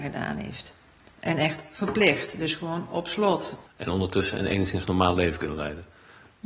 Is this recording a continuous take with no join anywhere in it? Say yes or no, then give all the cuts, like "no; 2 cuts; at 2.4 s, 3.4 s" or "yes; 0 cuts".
no; 1 cut; at 3.7 s